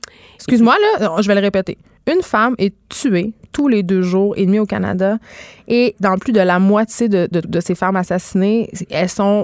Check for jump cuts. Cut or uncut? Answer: cut